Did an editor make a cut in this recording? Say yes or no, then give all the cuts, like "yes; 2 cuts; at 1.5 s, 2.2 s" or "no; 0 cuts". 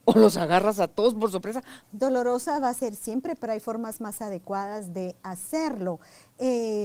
yes; 1 cut; at 1.8 s